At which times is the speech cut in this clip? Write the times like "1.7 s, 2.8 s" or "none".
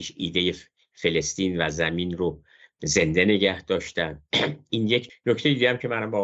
5.1 s